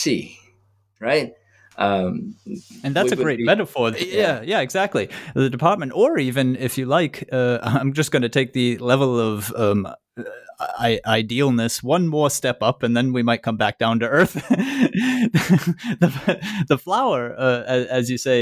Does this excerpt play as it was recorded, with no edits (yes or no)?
no